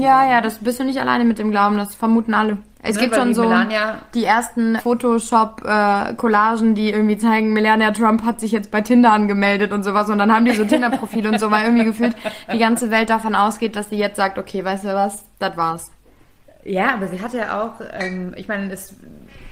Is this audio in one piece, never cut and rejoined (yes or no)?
no